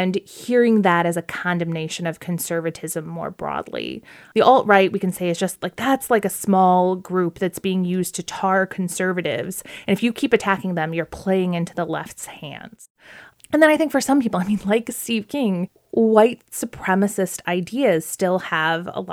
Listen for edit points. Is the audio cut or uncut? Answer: uncut